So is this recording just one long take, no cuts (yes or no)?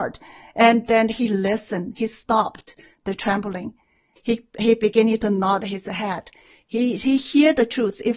no